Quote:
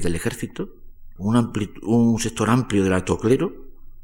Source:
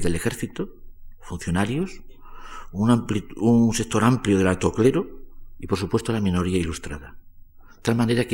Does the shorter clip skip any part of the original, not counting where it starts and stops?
yes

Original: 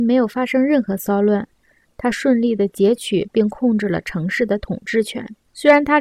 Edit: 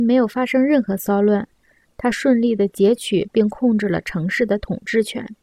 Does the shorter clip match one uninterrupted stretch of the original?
yes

